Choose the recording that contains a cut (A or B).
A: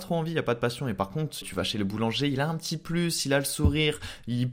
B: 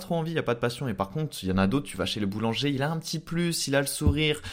A